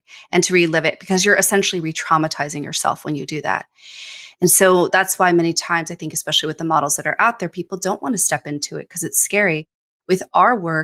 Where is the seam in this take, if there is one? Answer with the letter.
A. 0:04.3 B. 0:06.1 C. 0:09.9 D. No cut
D